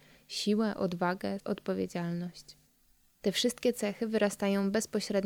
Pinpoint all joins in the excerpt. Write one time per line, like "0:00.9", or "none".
0:01.4